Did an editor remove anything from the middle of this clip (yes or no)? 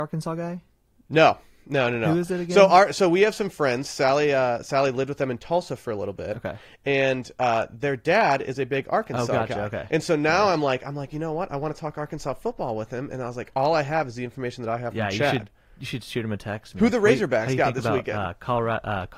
no